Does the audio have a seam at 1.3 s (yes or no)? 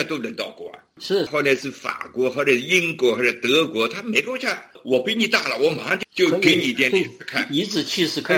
yes